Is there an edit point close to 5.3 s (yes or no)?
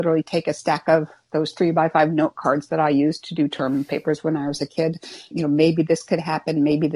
yes